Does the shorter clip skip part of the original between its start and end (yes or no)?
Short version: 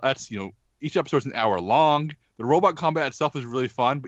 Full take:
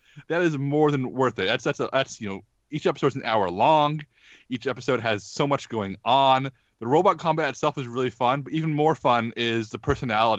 yes